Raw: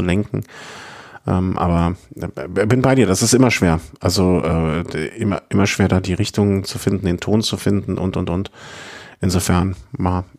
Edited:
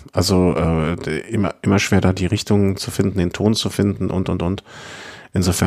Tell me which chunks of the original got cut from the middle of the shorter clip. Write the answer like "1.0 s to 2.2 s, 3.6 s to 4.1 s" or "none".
none